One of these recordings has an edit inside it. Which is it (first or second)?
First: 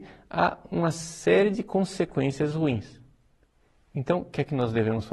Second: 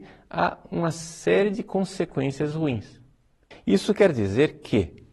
second